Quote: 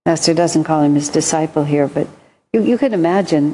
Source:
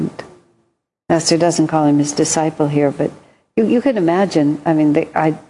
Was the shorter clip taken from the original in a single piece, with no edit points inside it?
yes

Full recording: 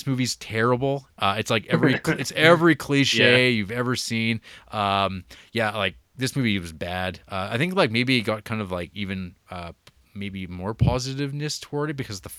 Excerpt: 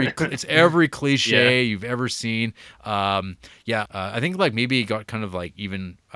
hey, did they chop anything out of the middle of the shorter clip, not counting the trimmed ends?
yes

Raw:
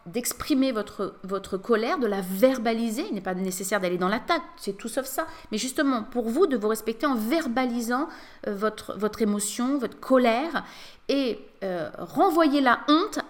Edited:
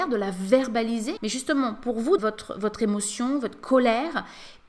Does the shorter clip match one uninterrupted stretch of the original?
no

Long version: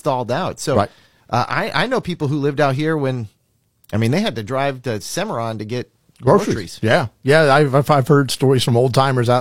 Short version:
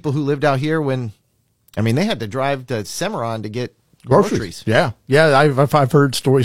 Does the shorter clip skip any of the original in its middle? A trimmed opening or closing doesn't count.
no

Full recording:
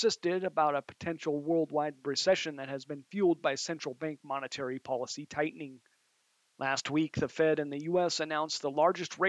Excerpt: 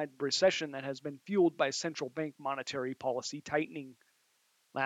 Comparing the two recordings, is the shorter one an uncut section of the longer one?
yes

